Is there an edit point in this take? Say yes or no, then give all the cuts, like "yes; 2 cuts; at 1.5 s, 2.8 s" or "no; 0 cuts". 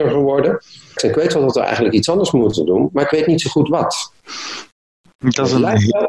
yes; 1 cut; at 1.0 s